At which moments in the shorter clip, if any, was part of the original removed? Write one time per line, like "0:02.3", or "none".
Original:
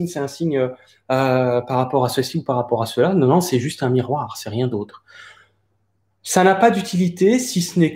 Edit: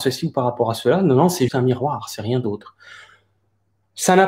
0:01.5